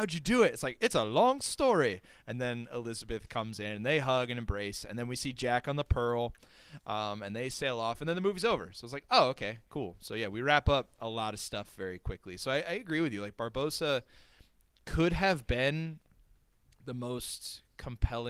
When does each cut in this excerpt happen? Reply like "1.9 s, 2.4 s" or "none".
none